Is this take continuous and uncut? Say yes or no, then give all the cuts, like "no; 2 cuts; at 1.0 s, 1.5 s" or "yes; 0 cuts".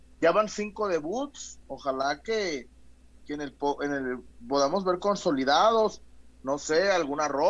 no; 1 cut; at 1.6 s